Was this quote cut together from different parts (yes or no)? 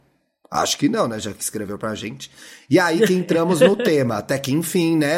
no